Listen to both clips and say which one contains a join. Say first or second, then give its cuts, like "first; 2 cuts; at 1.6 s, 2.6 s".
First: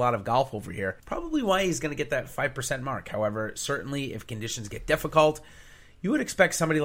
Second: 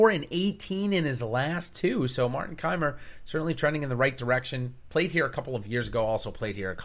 first; 1 cut; at 1.0 s